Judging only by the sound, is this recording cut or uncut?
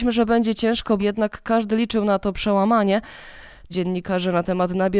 cut